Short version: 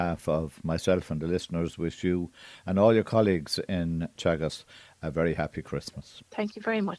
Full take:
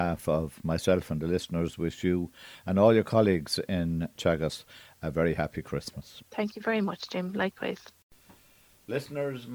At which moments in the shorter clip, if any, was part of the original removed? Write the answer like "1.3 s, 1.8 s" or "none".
none